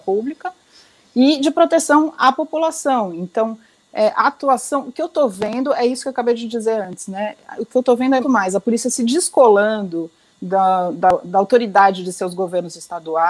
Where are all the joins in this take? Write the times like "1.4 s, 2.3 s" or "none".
8.2 s